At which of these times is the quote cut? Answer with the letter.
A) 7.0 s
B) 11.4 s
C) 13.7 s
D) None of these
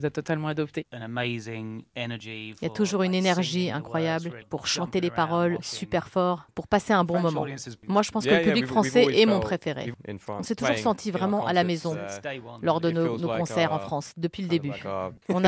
D